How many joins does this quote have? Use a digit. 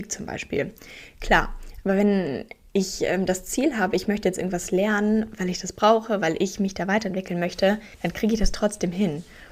1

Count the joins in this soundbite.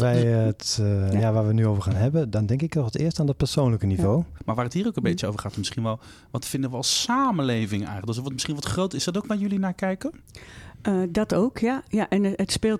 1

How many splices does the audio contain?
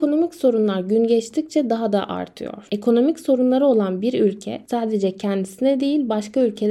0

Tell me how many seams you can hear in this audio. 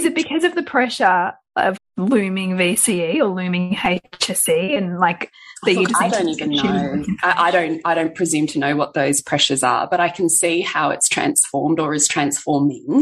1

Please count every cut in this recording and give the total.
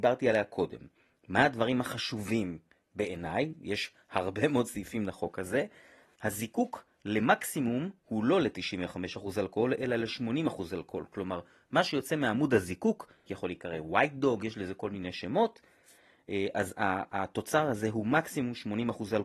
2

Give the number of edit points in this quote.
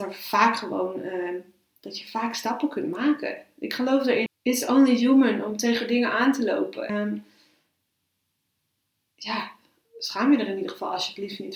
2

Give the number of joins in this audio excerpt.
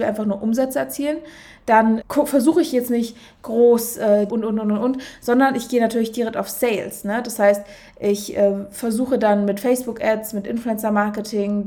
2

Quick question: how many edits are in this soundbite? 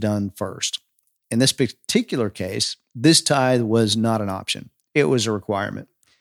0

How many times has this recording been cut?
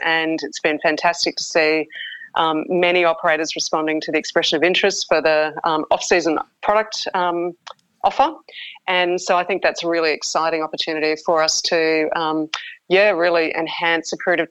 0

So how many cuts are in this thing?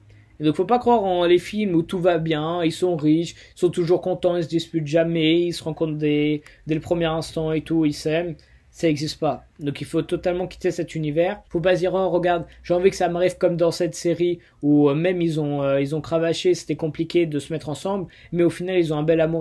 1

